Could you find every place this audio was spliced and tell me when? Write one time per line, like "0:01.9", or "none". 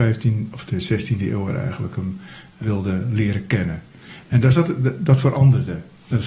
0:02.6